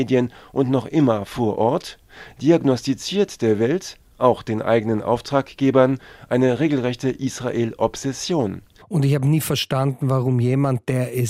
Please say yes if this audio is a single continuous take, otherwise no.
no